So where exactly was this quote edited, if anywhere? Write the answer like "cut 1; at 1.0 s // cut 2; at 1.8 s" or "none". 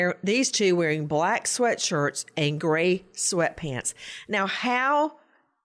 none

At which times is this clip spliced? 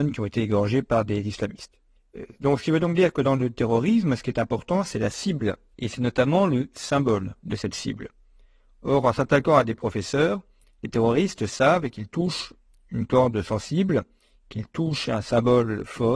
none

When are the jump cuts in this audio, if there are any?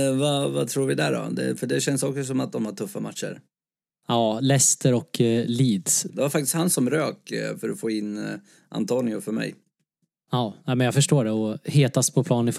cut 1; at 6.1 s

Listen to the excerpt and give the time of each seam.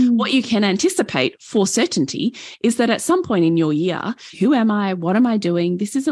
cut 1; at 4.3 s

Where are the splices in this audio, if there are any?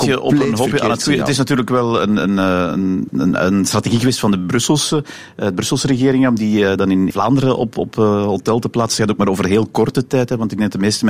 cut 1; at 3.1 s // cut 2; at 7.1 s

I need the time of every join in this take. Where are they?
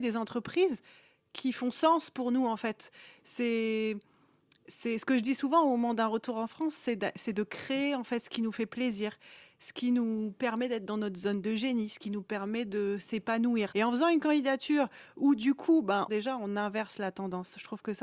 cut 1; at 13.7 s // cut 2; at 16.1 s

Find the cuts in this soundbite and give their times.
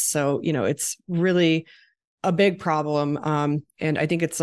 none

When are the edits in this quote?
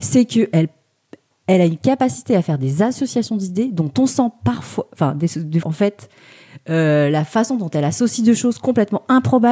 cut 1; at 5.6 s

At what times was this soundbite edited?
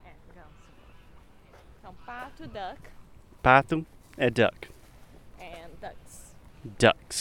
none

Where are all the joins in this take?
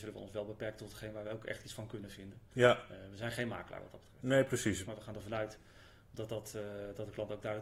cut 1; at 4.8 s

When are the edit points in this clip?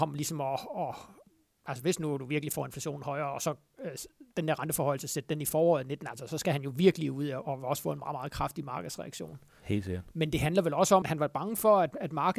cut 1; at 11.0 s

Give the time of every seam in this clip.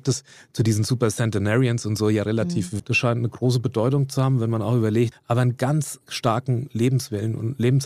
cut 1; at 2.8 s // cut 2; at 5.1 s

